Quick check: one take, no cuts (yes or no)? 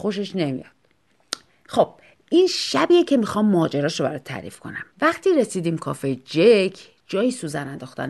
no